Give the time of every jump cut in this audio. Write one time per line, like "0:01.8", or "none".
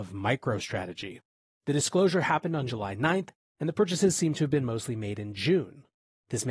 none